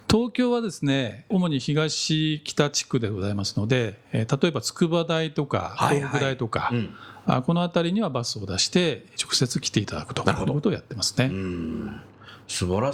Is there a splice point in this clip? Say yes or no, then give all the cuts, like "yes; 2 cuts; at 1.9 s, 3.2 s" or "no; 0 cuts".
no; 0 cuts